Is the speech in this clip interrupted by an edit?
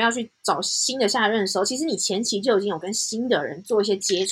no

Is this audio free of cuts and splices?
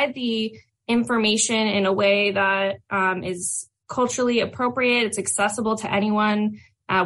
yes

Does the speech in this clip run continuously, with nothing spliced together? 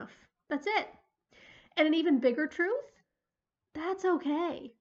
yes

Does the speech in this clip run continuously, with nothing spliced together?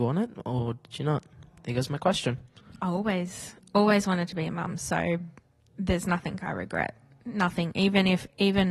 yes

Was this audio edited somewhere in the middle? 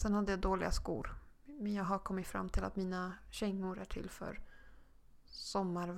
no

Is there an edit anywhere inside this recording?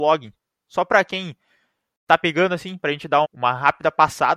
yes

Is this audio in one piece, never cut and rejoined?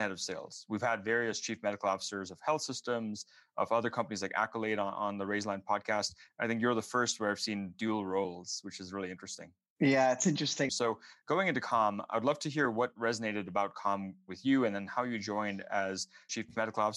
no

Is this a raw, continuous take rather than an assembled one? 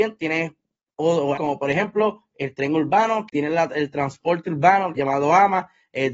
no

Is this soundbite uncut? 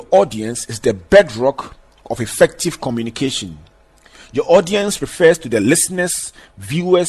yes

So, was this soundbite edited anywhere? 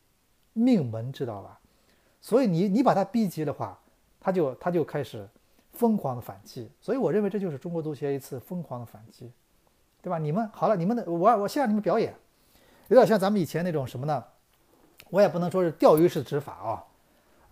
no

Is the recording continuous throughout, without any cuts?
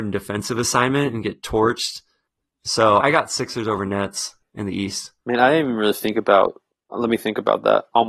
no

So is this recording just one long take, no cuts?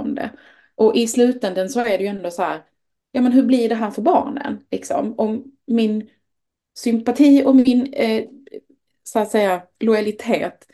yes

